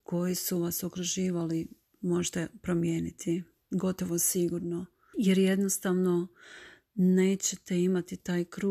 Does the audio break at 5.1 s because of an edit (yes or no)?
yes